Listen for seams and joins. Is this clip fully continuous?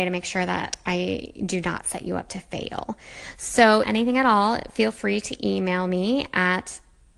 no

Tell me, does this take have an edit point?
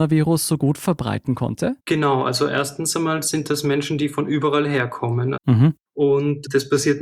yes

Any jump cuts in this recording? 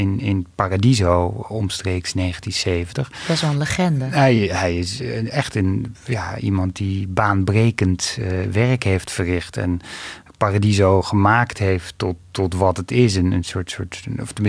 no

